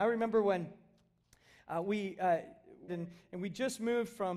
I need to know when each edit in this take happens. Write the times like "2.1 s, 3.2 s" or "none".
2.9 s